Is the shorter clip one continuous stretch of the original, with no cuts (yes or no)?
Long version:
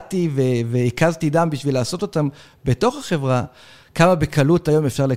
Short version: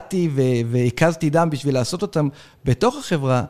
yes